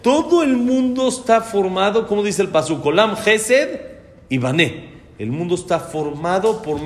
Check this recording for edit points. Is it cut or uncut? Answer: uncut